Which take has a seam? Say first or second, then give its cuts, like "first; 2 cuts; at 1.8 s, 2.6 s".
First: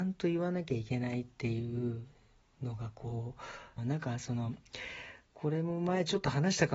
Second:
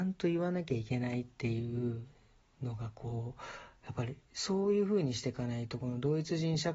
first; 1 cut; at 3.8 s